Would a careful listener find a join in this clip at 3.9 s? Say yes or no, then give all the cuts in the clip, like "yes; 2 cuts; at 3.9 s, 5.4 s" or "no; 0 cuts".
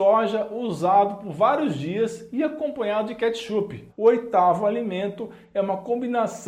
yes; 1 cut; at 3.9 s